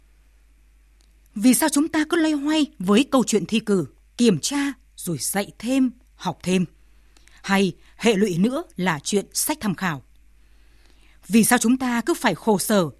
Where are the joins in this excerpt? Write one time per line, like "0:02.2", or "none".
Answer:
none